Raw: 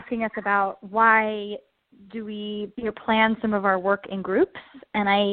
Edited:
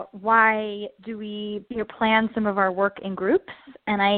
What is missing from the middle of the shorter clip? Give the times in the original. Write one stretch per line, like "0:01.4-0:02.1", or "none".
0:01.7-0:02.1